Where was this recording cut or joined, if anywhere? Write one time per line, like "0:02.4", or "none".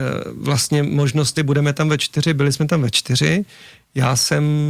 0:01.4